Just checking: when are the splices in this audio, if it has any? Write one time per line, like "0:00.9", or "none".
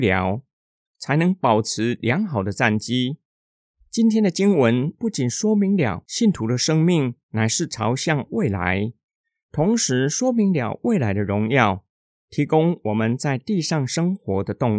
none